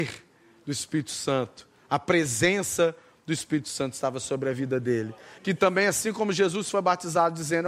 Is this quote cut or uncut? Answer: cut